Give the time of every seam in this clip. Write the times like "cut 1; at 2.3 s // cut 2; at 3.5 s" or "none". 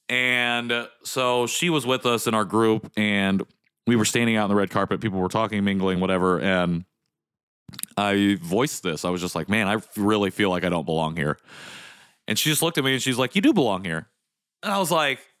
none